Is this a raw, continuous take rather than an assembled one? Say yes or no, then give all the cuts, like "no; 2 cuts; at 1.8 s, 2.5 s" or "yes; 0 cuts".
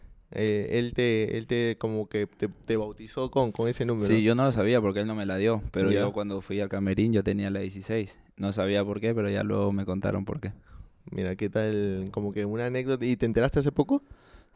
yes; 0 cuts